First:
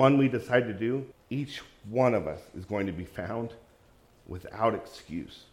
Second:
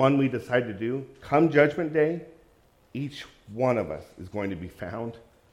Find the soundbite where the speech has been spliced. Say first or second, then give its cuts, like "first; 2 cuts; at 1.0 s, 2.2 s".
first; 1 cut; at 1.1 s